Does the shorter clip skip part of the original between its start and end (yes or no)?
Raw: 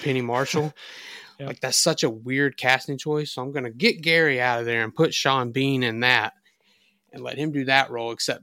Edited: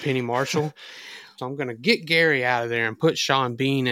yes